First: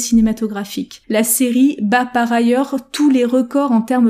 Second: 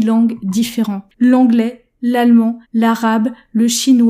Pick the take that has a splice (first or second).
second